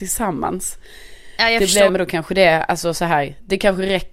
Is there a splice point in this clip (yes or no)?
yes